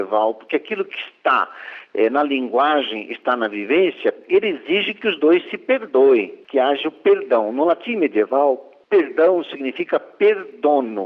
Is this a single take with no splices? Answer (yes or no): yes